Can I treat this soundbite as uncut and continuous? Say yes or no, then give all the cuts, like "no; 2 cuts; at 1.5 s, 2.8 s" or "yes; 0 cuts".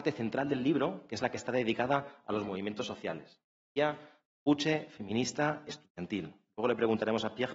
yes; 0 cuts